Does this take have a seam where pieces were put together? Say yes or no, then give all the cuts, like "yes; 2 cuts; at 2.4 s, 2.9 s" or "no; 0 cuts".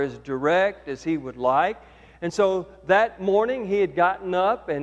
no; 0 cuts